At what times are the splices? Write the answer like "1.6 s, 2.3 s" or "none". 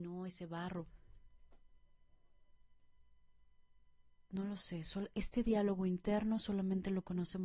none